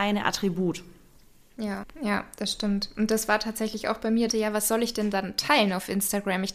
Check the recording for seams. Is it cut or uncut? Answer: cut